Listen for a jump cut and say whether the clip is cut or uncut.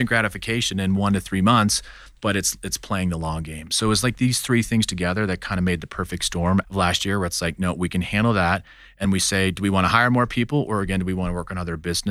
cut